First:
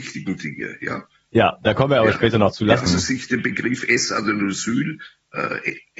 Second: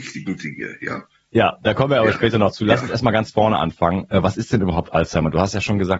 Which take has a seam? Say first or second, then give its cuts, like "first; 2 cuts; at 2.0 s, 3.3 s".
first; 1 cut; at 2.9 s